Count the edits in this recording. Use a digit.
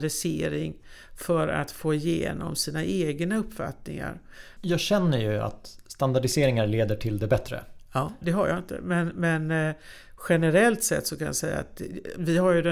2